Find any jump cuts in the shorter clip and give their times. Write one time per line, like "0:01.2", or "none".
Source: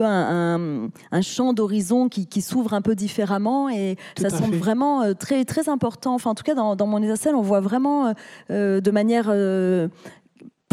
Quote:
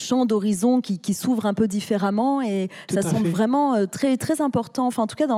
none